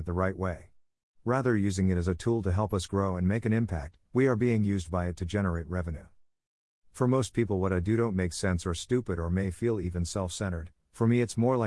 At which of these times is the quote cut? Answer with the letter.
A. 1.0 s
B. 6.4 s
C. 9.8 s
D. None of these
D